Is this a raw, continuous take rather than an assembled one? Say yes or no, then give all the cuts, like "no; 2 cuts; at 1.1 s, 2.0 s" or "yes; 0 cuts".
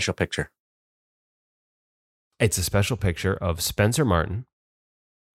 yes; 0 cuts